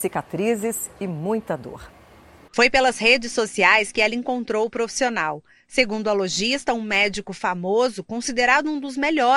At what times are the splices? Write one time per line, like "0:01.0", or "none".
0:02.5